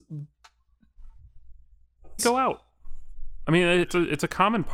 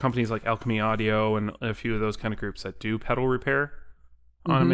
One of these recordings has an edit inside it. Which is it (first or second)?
first